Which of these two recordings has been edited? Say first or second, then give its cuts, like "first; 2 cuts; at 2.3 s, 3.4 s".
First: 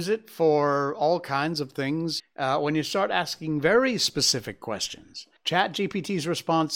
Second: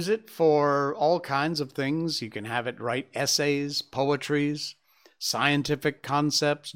first; 2 cuts; at 2.2 s, 5.4 s